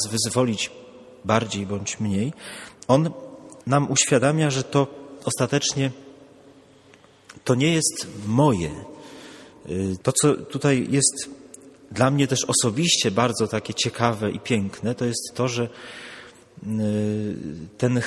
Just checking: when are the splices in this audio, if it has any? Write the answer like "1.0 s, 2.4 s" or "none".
3.6 s, 10.0 s